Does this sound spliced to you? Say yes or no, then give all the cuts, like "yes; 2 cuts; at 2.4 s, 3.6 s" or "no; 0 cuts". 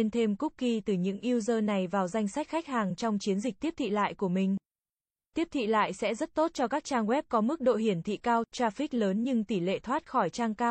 no; 0 cuts